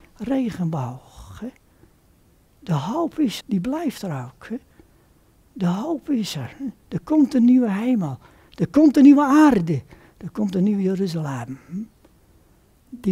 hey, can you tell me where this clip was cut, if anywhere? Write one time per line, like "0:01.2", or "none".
0:03.4

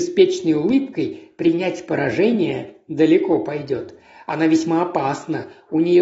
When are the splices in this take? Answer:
none

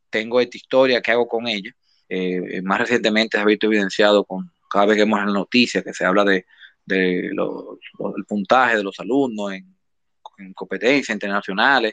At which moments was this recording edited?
0:02.0

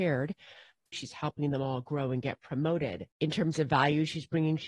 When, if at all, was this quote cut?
0:00.9
0:03.1

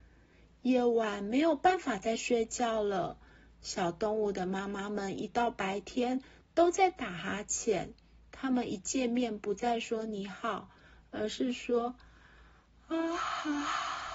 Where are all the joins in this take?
none

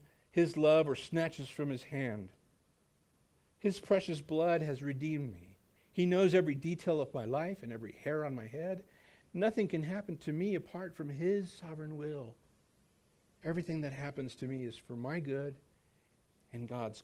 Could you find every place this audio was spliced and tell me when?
0:05.8

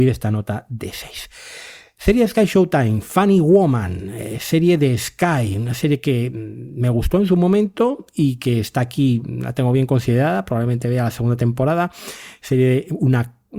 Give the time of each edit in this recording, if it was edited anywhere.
none

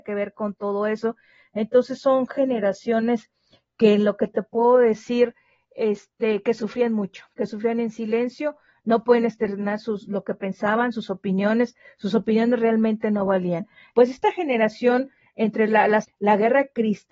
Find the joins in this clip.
0:13.9
0:16.0

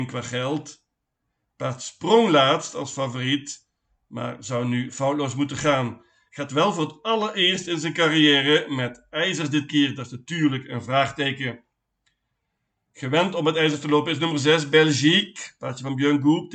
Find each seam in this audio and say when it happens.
none

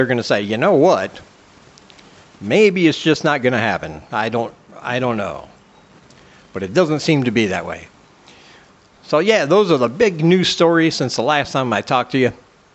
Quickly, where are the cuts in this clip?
none

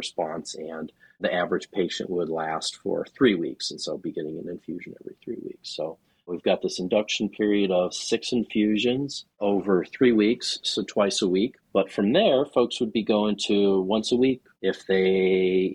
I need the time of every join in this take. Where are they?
0:11.6

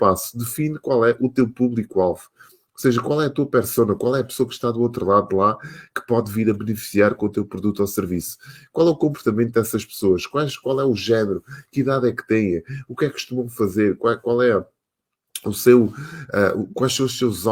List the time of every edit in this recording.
none

